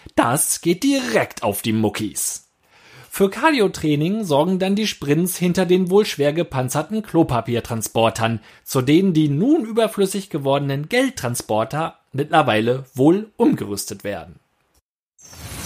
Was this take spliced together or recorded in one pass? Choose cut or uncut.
uncut